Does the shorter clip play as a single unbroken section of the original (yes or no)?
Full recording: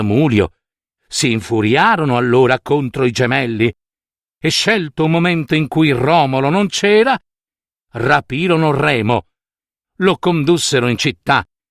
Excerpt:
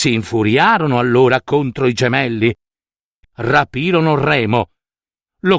no